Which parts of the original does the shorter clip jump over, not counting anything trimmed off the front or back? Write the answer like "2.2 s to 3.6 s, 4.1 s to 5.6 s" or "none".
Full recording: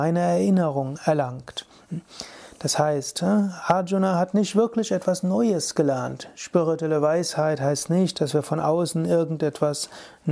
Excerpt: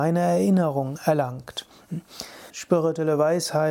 2.5 s to 6.3 s

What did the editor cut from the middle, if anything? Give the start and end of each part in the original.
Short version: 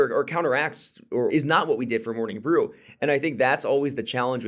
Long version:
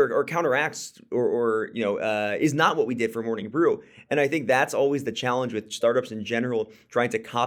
1.3 s to 2.4 s

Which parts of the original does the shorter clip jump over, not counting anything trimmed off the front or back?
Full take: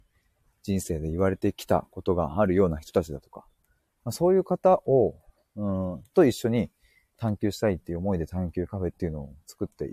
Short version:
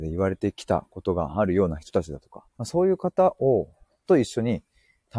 3.5 s to 3.9 s, 5.5 s to 6.1 s

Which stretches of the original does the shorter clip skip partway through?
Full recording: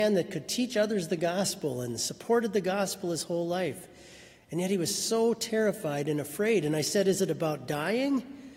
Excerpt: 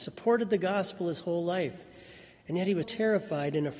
4.9 s to 5.4 s

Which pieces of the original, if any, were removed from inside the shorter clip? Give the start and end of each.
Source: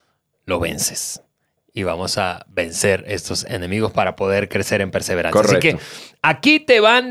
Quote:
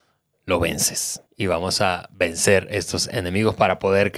1.3 s to 1.6 s

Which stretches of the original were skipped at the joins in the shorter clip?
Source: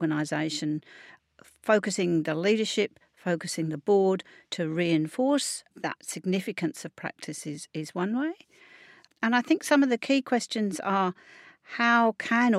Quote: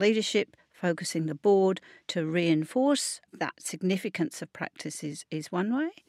none

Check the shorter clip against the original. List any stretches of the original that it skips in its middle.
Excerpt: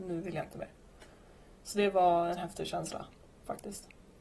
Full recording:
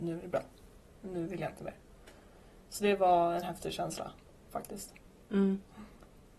none

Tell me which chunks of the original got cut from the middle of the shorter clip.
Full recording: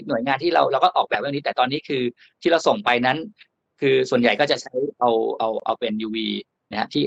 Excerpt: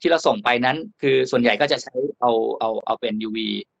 3.3 s to 3.7 s

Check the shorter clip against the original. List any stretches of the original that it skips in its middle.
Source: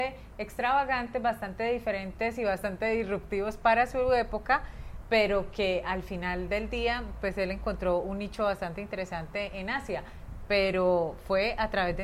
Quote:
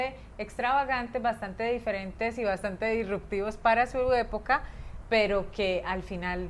none

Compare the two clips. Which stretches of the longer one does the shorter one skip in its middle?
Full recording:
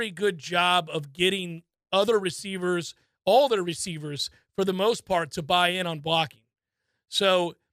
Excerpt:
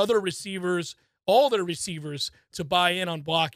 4.5 s to 5.3 s

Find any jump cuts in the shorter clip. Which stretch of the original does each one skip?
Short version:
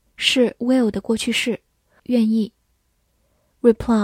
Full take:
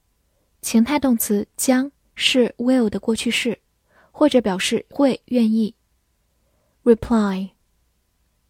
4.0 s to 5.2 s

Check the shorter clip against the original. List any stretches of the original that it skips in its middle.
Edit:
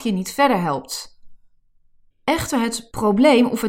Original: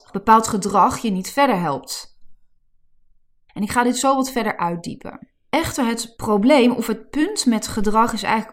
3.1 s to 5.4 s

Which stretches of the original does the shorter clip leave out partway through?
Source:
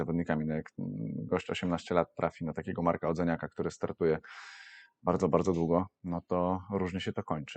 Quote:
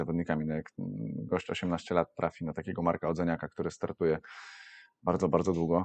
none

